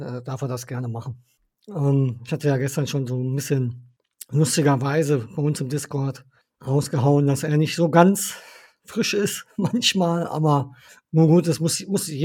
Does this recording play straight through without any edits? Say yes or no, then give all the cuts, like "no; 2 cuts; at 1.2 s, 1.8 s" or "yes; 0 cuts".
no; 1 cut; at 1.6 s